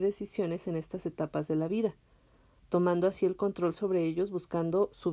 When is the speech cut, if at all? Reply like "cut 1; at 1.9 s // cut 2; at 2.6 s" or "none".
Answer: none